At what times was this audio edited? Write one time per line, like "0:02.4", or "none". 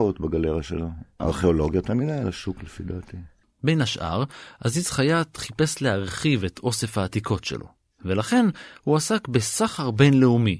none